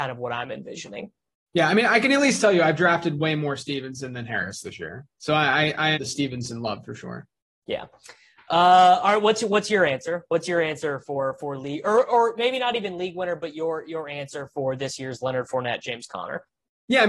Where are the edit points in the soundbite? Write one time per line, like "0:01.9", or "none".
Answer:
0:05.9